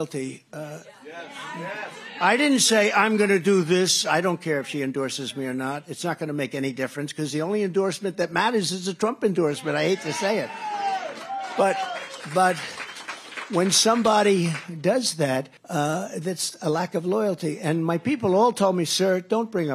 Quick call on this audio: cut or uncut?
cut